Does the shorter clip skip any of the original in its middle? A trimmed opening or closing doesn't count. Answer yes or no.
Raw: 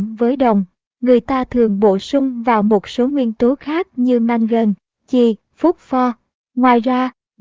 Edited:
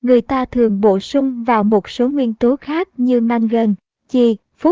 no